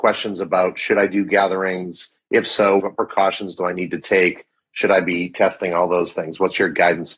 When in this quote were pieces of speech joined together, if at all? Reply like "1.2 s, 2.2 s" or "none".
2.8 s